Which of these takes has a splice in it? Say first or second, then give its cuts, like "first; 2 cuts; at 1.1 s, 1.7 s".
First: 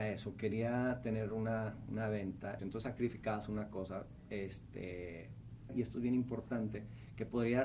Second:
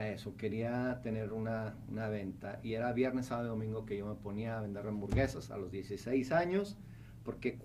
first; 2 cuts; at 2.6 s, 5.7 s